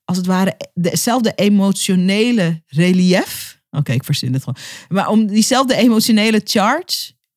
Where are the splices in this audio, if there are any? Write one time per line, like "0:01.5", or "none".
none

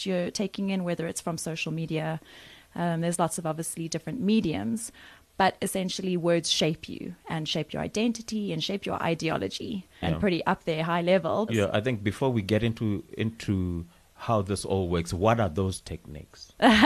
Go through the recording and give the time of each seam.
0:10.0
0:11.5

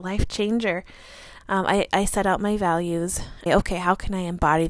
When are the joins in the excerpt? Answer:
0:01.4
0:03.5

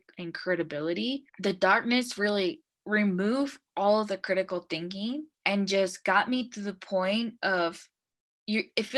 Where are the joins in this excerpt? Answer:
0:01.3
0:05.3

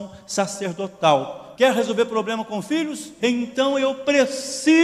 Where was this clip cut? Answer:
0:01.5
0:03.2

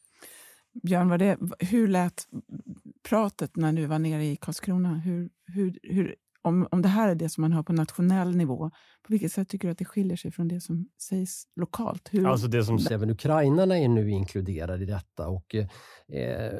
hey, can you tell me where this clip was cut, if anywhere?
0:12.9

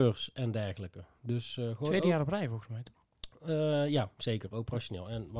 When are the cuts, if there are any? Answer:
none

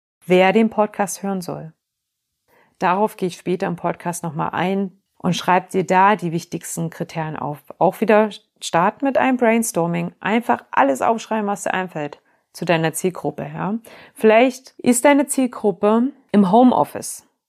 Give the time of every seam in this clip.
0:05.1

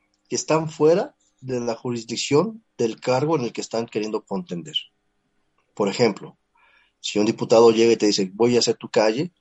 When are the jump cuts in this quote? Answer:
none

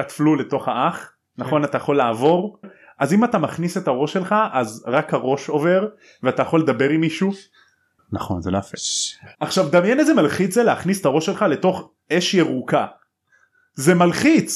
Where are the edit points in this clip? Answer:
0:02.6
0:08.0
0:09.3

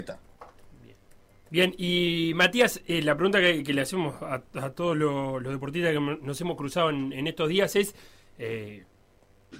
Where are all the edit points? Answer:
0:01.5

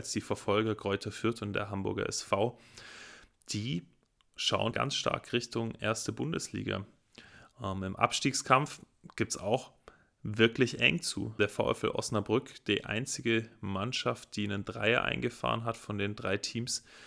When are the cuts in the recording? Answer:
0:04.7

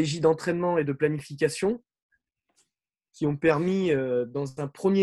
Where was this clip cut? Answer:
none

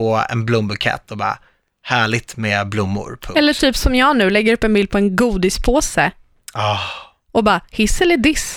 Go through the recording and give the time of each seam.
none

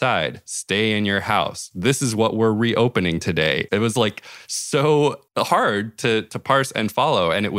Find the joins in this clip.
0:03.7
0:05.3

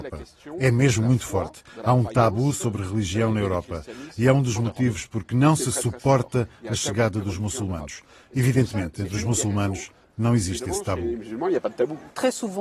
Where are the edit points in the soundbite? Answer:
none

